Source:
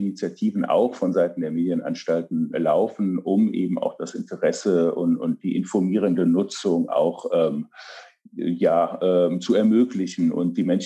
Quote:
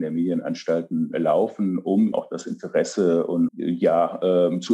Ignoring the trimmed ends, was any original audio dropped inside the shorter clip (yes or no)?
yes